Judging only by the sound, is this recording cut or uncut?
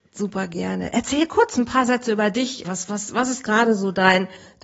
cut